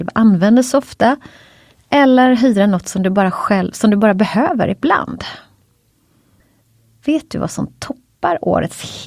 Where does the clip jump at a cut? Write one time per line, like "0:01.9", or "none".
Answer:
none